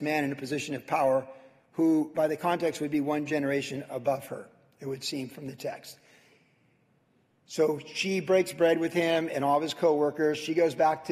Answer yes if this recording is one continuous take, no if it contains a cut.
yes